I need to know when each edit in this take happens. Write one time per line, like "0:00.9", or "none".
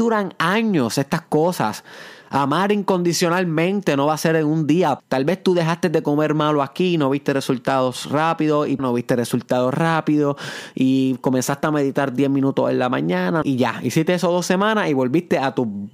0:05.0
0:08.8
0:13.4

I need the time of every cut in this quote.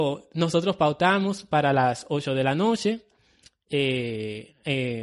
none

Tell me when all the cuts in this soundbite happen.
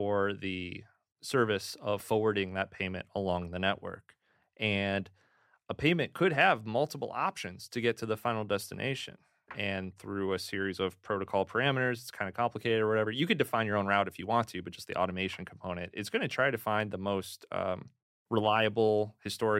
none

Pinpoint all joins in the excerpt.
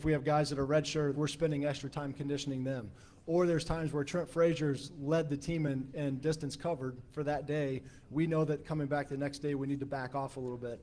0:01.1

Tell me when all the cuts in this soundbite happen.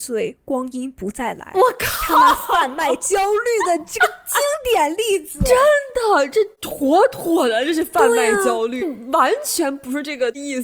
0:08.8

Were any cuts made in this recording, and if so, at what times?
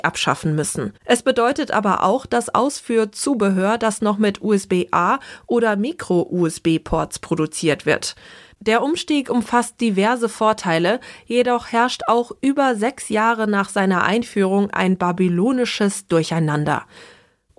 0:01.0
0:08.5

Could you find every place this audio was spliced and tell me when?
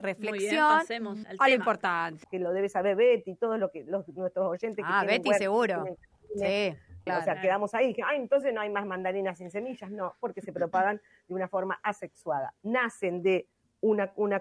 0:01.2
0:02.2
0:07.1

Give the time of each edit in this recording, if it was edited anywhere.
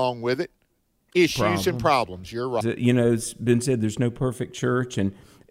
0:02.6

